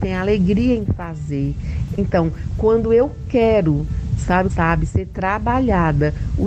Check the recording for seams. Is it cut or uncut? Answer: cut